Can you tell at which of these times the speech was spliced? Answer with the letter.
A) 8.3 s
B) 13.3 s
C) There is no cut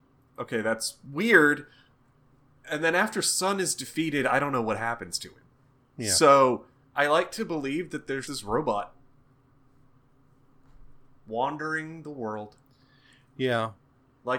A